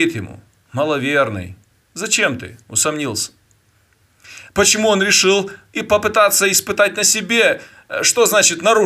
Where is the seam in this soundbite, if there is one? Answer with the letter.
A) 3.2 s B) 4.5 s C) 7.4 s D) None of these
B